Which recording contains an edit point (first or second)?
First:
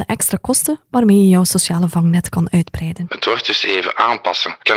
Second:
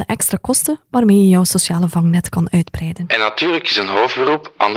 first